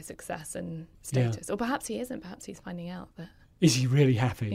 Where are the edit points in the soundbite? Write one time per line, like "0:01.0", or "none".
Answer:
0:00.9